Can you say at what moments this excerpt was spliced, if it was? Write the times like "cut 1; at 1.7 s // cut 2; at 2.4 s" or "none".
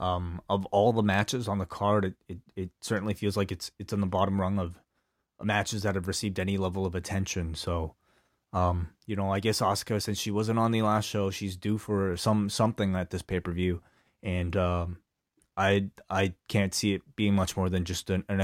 none